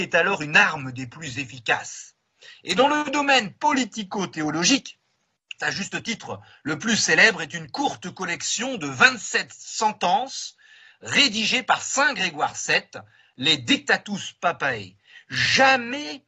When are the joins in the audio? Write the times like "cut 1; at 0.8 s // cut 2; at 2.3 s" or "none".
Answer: cut 1; at 5.6 s